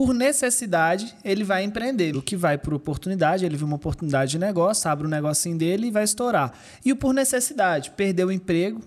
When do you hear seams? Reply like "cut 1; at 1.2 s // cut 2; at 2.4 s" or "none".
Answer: cut 1; at 2.1 s